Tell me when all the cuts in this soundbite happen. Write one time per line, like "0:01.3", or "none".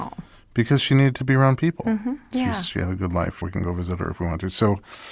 0:02.3
0:03.4